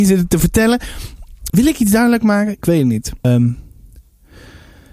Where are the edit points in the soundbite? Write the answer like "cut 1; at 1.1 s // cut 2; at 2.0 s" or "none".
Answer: cut 1; at 1.5 s // cut 2; at 3.2 s